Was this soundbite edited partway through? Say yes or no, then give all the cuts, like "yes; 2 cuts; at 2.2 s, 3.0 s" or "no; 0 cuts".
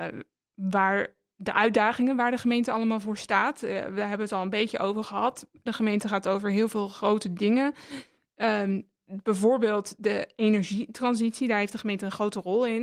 yes; 1 cut; at 5.7 s